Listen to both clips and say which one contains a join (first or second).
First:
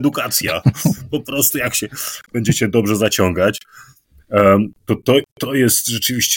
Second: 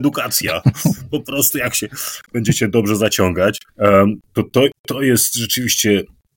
second